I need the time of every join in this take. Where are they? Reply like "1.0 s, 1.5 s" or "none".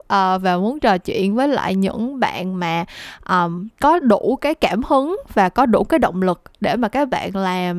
3.7 s

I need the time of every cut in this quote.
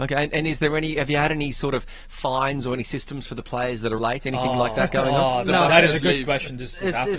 4.0 s

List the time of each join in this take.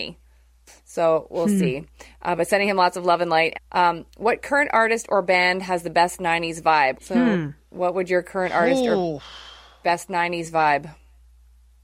3.5 s, 7.0 s

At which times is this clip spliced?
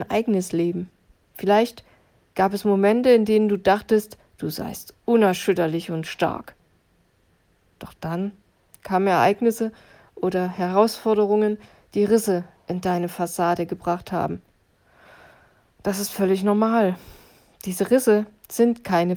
none

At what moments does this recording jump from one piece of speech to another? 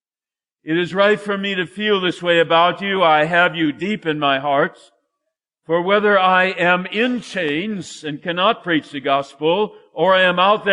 none

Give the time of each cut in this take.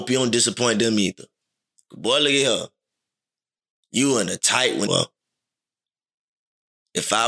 4.9 s

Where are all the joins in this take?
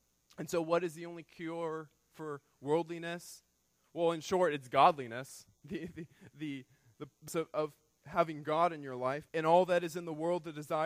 7.3 s, 9.3 s

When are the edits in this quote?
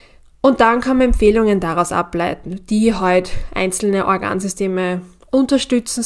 none

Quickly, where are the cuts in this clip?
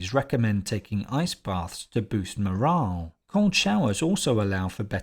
3.2 s

